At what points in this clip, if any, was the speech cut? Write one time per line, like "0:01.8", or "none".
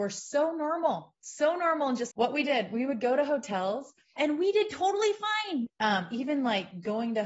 0:02.1
0:04.2
0:05.7